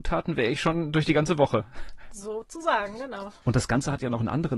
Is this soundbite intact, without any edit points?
yes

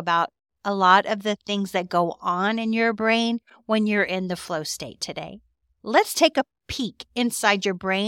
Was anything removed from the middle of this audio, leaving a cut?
no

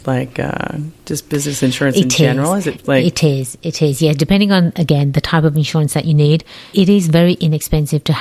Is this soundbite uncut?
no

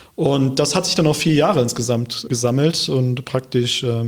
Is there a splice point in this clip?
yes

